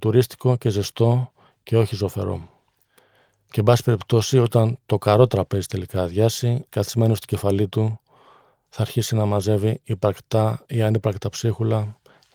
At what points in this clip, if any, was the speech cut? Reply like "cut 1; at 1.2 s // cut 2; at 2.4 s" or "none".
cut 1; at 6.7 s